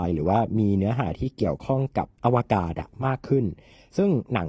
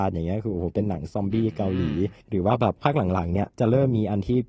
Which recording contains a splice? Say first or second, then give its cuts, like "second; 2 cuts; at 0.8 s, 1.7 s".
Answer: second; 1 cut; at 2.2 s